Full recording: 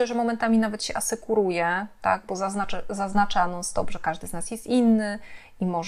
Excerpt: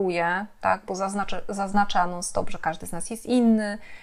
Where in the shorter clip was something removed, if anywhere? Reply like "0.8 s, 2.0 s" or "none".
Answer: none